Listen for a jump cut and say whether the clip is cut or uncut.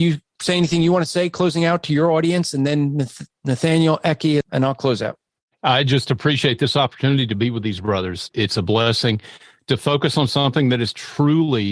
cut